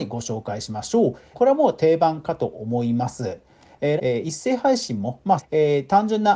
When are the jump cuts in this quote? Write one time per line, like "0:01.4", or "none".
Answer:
0:01.3
0:04.0
0:05.4